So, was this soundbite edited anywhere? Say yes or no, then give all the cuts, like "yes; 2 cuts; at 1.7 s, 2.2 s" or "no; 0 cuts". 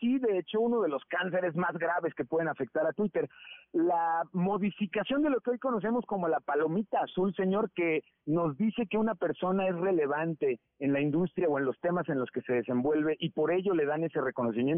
no; 0 cuts